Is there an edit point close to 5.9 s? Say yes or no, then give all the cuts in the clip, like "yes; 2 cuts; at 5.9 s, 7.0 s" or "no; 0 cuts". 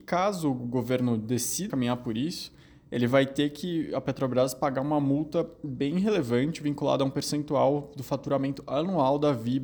no; 1 cut; at 1.7 s